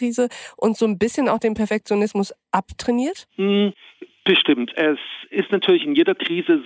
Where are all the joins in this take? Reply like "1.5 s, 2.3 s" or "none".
none